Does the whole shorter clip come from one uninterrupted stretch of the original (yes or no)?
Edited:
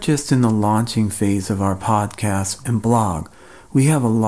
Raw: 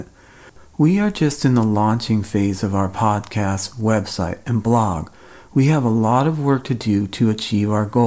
no